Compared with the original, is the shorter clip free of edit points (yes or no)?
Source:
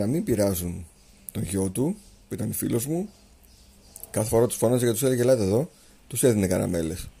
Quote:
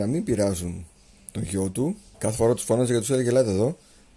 no